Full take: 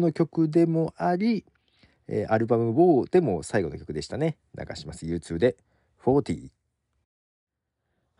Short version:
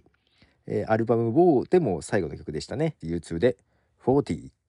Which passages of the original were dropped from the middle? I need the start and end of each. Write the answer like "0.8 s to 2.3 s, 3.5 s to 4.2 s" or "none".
4.4 s to 5.0 s

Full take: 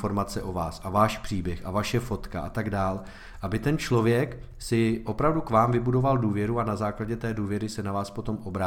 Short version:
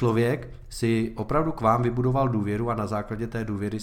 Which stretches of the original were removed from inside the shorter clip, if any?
none

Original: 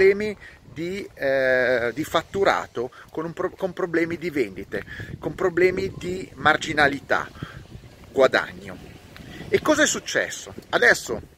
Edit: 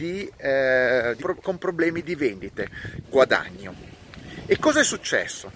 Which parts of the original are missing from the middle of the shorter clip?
2.0 s to 3.3 s, 5.2 s to 8.1 s

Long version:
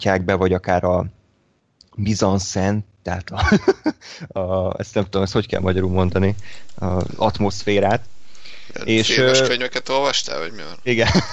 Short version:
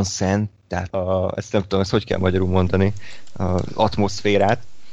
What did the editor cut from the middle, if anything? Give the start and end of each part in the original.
3.2 s to 4.3 s

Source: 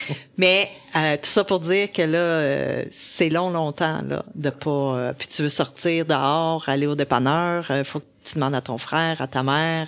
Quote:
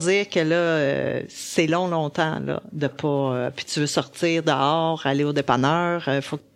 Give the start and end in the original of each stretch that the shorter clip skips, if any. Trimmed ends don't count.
none

